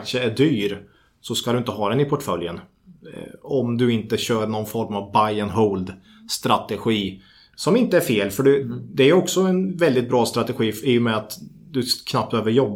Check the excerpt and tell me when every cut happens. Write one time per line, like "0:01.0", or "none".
none